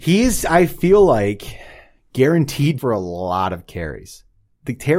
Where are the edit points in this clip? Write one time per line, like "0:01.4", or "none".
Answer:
0:02.8